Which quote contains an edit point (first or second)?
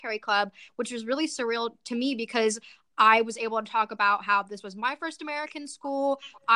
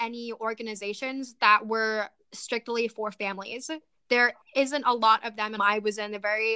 second